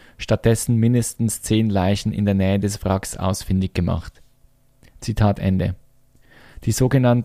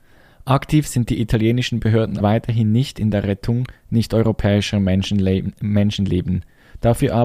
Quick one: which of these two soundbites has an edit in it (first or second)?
second